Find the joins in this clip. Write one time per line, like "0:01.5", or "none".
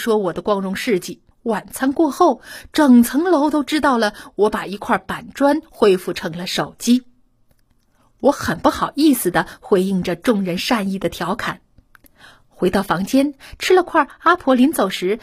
0:01.3

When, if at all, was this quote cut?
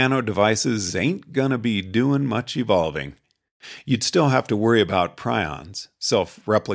none

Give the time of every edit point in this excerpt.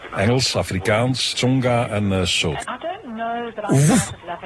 0:01.3
0:02.6

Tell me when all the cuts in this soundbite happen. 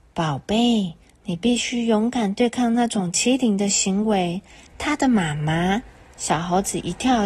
0:04.7

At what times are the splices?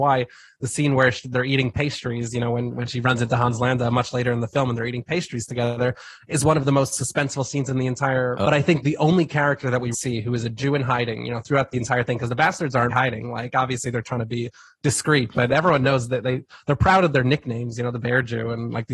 0:08.4
0:09.9
0:12.9

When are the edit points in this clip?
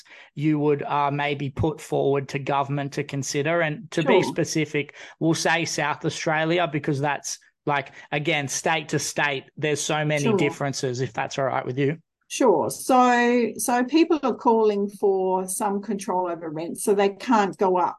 none

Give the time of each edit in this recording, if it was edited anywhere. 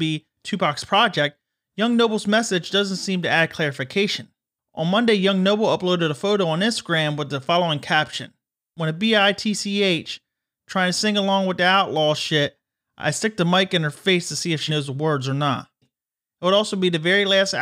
0:14.7
0:15.8

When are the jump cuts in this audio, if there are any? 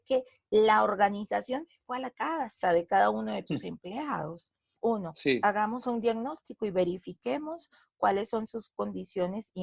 none

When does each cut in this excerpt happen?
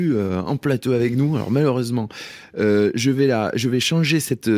none

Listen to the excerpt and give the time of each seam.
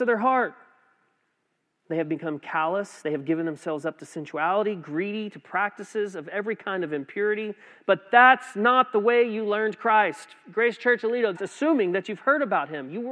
0:11.4

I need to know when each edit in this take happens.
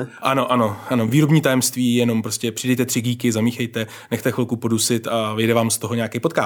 none

